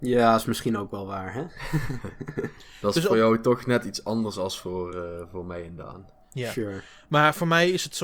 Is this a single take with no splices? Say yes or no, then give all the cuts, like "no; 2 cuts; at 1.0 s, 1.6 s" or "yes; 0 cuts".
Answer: yes; 0 cuts